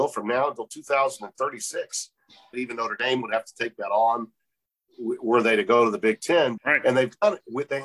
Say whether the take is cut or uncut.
cut